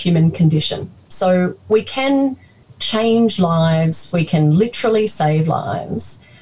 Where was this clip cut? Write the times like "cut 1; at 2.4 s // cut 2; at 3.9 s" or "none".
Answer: none